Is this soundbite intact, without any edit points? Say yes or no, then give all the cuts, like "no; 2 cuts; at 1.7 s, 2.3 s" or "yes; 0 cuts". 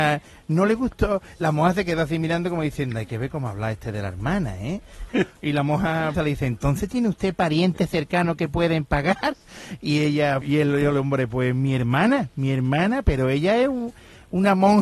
no; 3 cuts; at 5.1 s, 6.1 s, 10.4 s